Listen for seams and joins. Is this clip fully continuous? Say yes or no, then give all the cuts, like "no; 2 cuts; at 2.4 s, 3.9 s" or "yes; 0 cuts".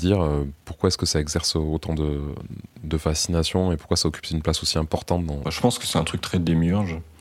no; 1 cut; at 5.4 s